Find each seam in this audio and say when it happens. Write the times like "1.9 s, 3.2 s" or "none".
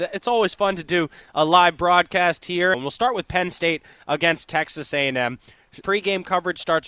2.7 s, 5.8 s